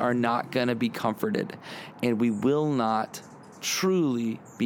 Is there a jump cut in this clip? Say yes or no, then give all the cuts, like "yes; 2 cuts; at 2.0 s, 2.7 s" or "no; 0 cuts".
no; 0 cuts